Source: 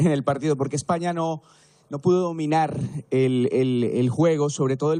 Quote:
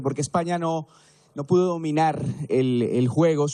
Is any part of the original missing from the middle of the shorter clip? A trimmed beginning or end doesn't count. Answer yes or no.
yes